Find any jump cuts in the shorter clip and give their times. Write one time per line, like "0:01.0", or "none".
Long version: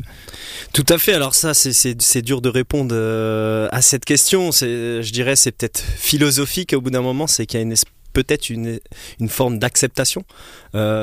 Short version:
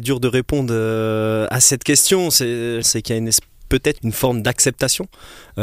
0:02.8
0:04.0